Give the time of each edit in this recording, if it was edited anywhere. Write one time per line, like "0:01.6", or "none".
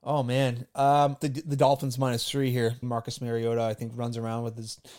0:01.2
0:02.8